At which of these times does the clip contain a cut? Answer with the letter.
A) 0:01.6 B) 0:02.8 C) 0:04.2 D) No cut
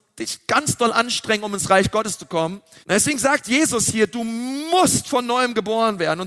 B